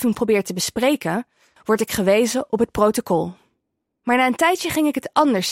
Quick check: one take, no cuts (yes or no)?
no